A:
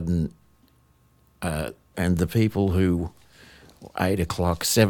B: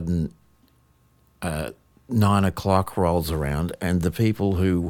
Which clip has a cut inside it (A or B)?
A